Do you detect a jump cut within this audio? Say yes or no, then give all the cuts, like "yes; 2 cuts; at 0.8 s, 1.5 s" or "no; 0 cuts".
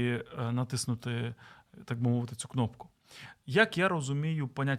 yes; 1 cut; at 3.4 s